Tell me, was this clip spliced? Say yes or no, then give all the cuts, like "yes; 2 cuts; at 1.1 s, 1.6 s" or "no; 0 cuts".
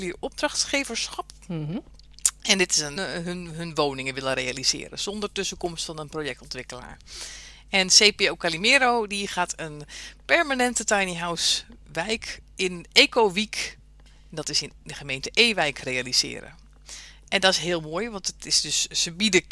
yes; 1 cut; at 3.0 s